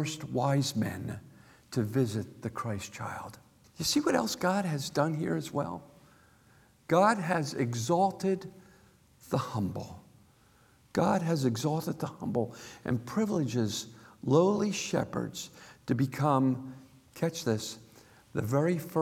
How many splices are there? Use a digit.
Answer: 1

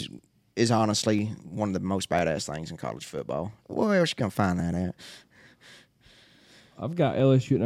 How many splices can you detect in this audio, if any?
1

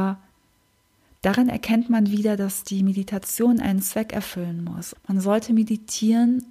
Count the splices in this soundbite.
1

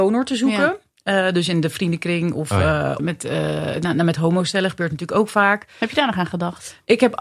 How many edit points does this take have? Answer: 1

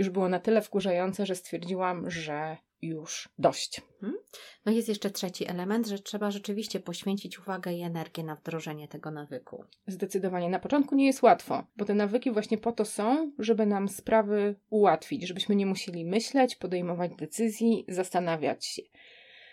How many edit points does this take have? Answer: 1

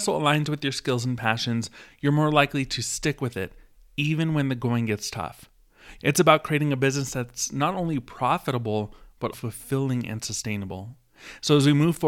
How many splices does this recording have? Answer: 2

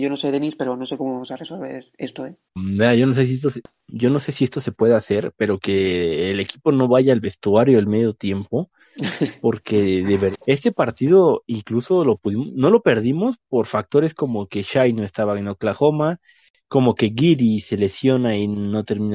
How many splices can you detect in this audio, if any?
2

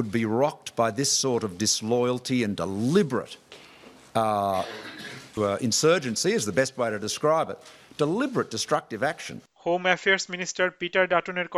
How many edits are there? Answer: 1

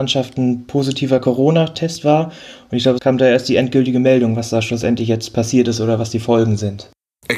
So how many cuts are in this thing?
1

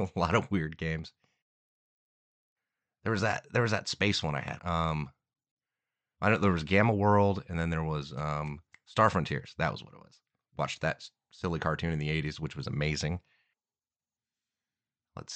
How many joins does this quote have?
2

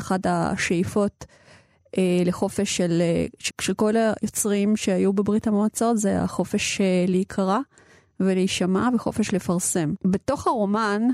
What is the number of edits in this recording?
2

